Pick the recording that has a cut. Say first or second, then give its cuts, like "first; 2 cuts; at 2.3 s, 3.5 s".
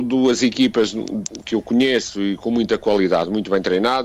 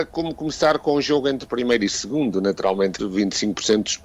second; 1 cut; at 3.0 s